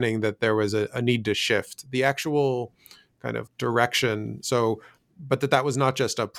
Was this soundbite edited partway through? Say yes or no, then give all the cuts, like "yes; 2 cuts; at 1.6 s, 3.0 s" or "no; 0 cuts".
yes; 1 cut; at 3.5 s